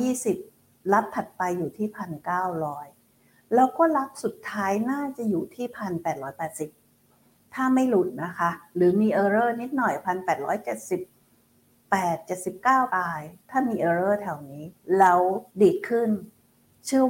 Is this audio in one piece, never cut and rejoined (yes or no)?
no